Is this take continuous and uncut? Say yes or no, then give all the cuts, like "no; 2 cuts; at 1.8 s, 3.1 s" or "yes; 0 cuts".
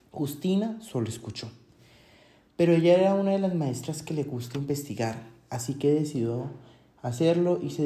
yes; 0 cuts